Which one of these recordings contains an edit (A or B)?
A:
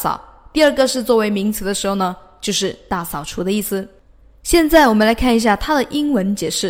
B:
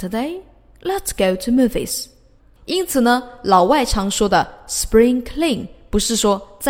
B